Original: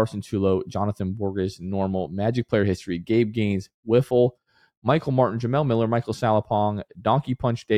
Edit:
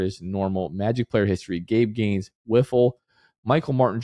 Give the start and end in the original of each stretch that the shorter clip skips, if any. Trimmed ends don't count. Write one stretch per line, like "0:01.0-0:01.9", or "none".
none